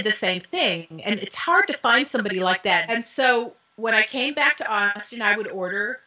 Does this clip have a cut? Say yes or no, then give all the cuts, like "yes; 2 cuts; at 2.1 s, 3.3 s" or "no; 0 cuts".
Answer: yes; 1 cut; at 2.9 s